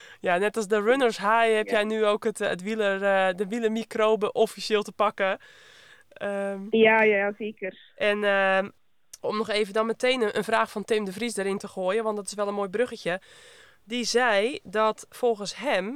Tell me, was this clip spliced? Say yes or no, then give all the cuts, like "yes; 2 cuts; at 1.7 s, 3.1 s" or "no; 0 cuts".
no; 0 cuts